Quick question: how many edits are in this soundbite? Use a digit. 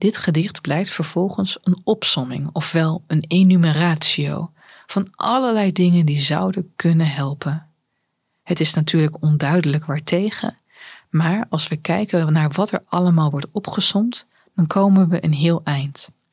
0